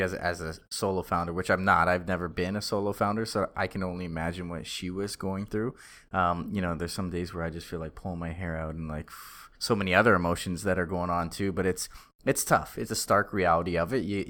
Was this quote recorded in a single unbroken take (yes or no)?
no